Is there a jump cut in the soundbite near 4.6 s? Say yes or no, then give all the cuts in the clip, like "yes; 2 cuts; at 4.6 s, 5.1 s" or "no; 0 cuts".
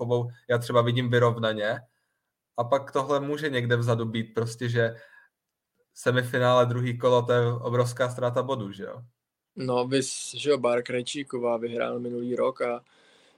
no; 0 cuts